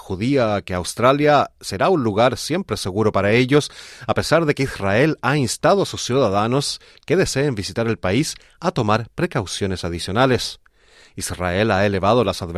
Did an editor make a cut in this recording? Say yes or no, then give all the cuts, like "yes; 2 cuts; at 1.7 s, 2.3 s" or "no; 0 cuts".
no; 0 cuts